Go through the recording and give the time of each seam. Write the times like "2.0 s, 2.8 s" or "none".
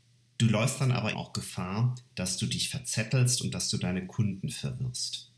1.1 s